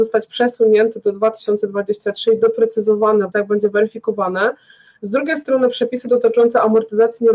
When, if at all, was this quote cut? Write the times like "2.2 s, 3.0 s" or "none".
3.3 s

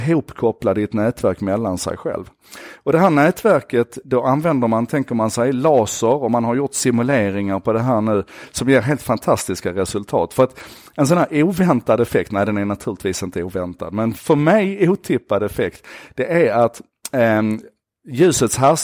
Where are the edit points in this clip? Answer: none

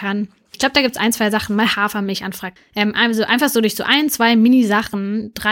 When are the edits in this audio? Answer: 2.6 s

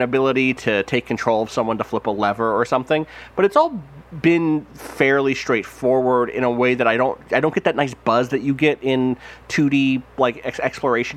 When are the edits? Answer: none

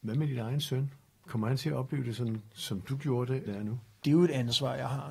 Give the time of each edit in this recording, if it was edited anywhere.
3.5 s

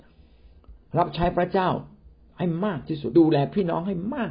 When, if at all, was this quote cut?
3.1 s

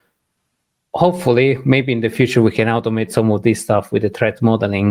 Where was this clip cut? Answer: none

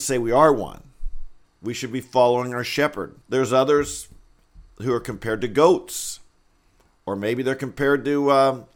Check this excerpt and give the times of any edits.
1.5 s, 3.2 s

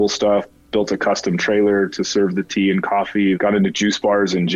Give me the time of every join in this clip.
3.3 s

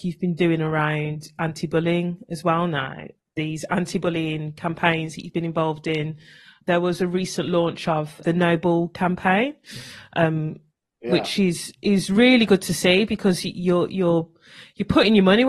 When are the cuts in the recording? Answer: none

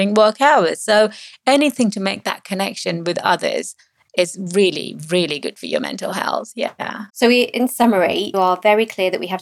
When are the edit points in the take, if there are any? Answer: 7.1 s, 8.3 s

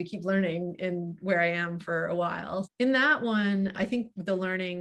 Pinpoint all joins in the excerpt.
2.6 s, 3.7 s

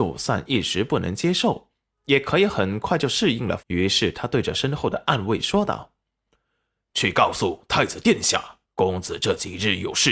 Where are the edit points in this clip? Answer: 3.6 s, 8.6 s

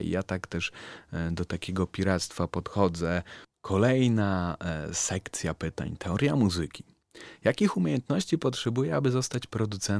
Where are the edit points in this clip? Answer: none

